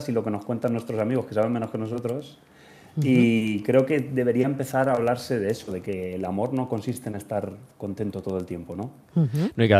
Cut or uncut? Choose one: uncut